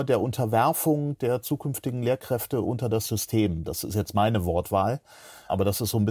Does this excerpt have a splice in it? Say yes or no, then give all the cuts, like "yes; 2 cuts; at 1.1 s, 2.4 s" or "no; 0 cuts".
no; 0 cuts